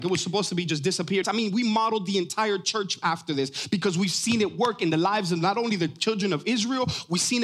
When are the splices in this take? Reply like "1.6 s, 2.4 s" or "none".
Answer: 1.2 s